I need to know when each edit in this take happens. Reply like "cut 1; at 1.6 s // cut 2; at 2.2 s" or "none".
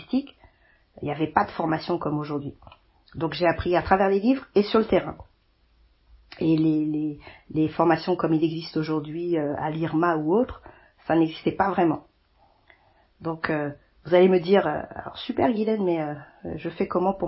none

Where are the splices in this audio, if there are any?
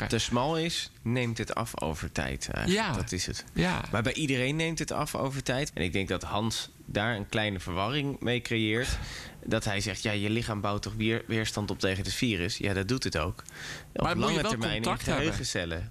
cut 1; at 5.7 s

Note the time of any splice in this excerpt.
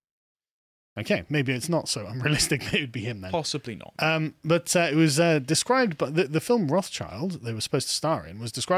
none

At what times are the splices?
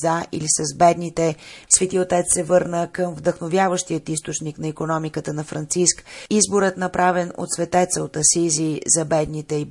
cut 1; at 1.7 s

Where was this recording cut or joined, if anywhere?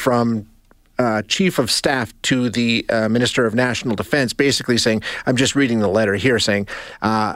none

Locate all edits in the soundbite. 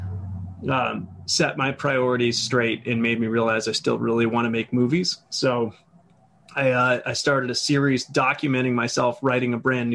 none

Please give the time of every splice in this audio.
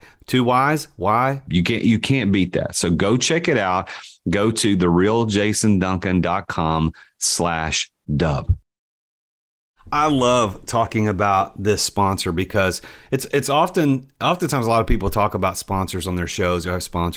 cut 1; at 1.5 s

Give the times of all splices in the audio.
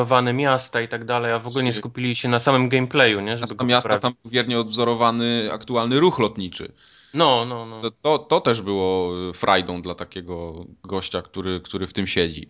none

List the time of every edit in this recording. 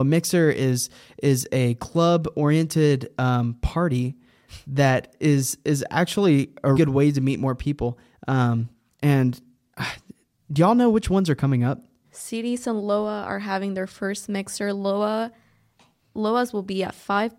cut 1; at 6.8 s // cut 2; at 12.0 s

